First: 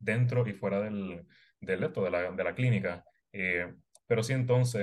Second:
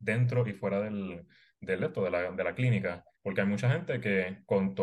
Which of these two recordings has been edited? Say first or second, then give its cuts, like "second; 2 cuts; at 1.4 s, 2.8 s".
second; 1 cut; at 3.1 s